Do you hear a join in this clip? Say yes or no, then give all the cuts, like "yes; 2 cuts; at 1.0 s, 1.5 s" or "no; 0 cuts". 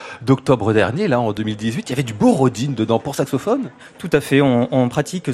no; 0 cuts